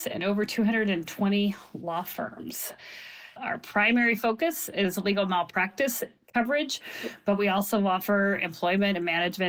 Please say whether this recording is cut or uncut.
cut